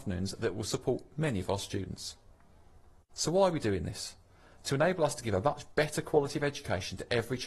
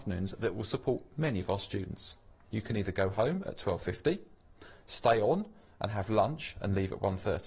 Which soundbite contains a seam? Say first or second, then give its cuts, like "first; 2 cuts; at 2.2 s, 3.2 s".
second; 1 cut; at 2.4 s